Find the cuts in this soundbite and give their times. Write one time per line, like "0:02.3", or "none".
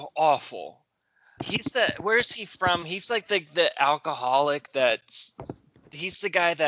0:01.4